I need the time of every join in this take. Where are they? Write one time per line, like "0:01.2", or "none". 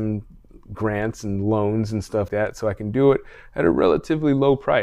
0:02.3